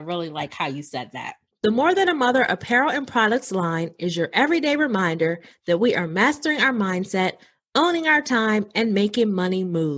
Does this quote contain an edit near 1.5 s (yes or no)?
yes